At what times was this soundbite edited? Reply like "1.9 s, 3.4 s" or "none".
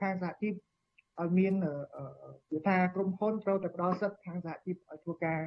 2.4 s